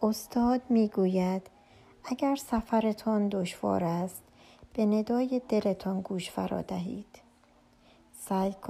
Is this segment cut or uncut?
uncut